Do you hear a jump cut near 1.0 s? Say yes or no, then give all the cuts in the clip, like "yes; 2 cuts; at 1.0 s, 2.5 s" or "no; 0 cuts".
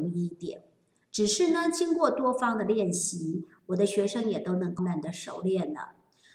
yes; 2 cuts; at 1.0 s, 4.8 s